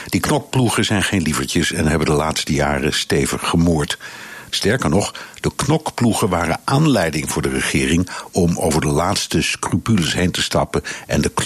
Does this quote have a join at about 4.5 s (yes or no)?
yes